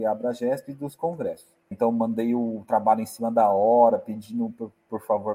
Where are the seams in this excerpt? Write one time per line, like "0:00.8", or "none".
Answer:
0:01.7